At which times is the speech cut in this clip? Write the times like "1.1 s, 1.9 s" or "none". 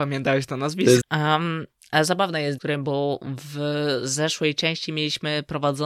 1.0 s, 2.6 s